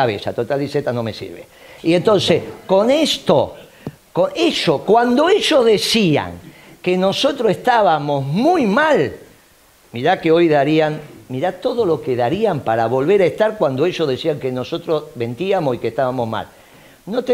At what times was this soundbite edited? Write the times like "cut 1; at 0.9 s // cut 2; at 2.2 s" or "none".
none